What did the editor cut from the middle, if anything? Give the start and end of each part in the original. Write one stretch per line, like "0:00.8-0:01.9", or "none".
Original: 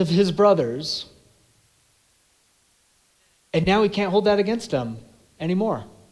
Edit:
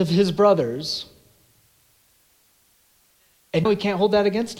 0:03.7-0:03.8